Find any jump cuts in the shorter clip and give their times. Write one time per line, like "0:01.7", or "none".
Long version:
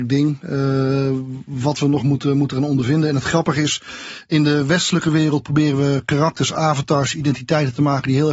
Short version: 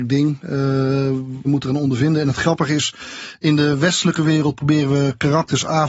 0:01.4